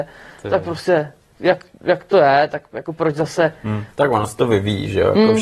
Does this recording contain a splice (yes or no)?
yes